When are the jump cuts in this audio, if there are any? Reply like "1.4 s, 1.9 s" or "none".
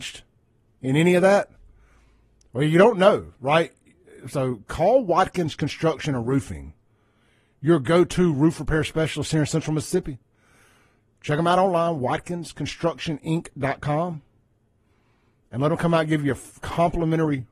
none